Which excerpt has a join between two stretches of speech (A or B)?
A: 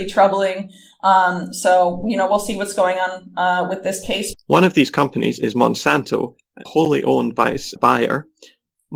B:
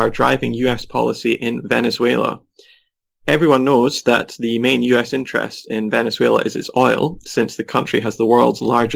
A